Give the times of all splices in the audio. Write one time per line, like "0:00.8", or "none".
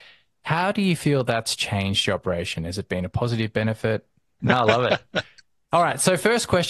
0:04.4